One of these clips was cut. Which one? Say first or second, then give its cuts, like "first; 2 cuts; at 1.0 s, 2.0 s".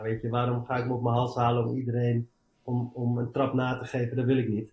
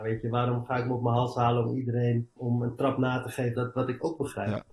second; 2 cuts; at 2.4 s, 3.5 s